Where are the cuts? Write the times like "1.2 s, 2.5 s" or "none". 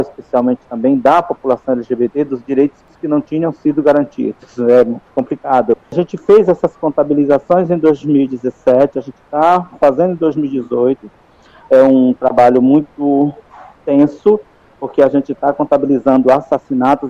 5.8 s